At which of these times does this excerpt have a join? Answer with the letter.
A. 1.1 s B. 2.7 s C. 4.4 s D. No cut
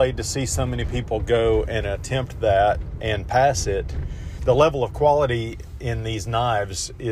C